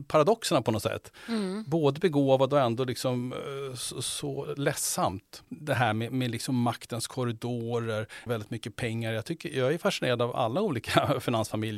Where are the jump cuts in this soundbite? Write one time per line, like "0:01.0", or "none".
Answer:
0:05.4
0:08.3
0:10.3